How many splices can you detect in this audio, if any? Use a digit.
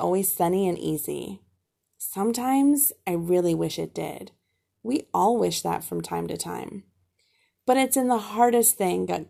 0